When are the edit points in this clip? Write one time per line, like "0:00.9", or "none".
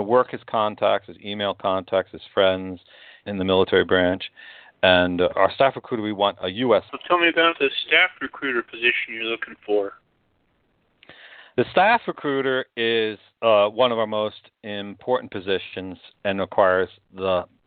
0:03.2
0:06.9

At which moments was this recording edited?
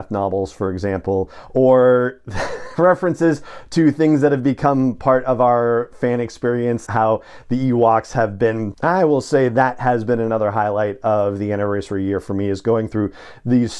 0:06.9
0:08.7

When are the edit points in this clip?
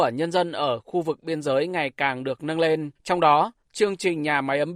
0:03.0

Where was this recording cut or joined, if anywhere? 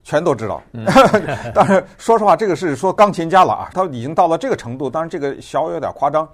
0:03.7

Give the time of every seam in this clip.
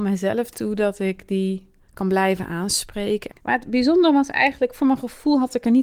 0:01.8
0:03.3

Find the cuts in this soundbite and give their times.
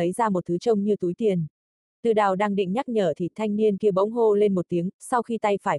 0:01.9

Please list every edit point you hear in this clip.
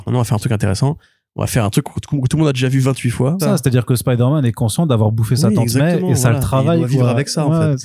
0:03.4

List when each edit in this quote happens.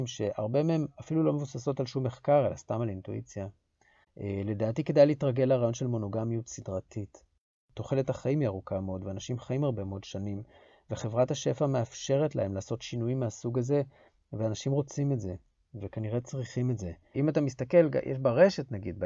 0:04.0
0:17.1

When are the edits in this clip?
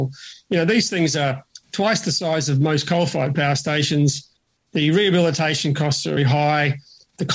0:06.2

